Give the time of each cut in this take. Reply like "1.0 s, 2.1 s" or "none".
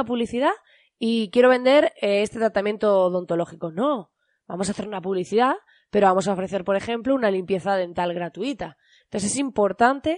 9.0 s